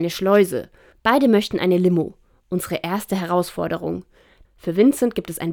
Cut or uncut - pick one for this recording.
cut